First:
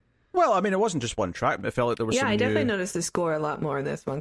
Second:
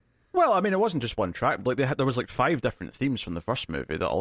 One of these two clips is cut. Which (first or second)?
first